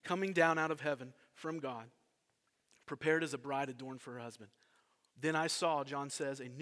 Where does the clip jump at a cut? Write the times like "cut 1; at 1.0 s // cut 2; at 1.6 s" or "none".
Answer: cut 1; at 5.1 s